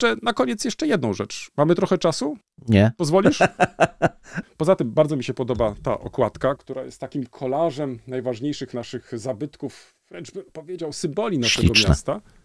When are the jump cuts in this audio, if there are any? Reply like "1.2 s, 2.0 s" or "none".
4.4 s, 6.6 s